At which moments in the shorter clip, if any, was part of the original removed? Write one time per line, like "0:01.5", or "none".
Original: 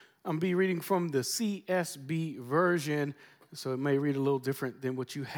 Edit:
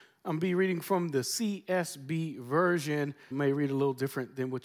0:03.3

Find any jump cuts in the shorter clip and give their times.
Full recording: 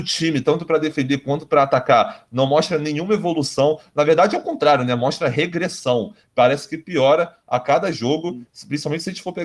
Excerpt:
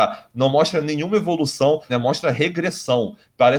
0:01.9

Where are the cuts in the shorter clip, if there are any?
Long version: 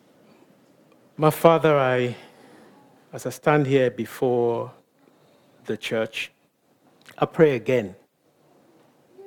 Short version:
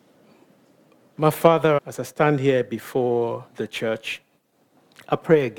0:01.8
0:03.5

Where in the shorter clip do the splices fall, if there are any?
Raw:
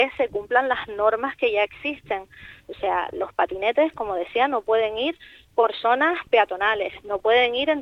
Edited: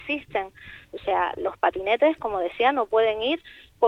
none

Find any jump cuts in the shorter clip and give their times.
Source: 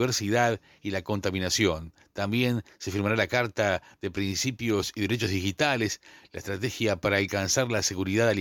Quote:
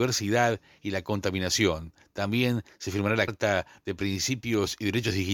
0:03.3

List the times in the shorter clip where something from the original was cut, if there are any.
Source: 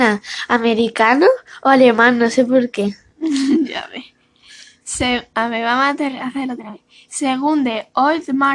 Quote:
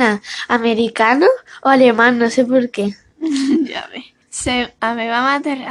0:04.2

